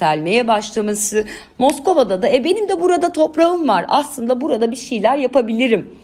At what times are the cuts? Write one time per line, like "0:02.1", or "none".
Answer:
0:01.5